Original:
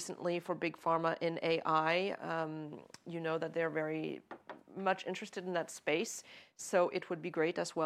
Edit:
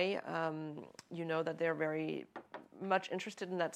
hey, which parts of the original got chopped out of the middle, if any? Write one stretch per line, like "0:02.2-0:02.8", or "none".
none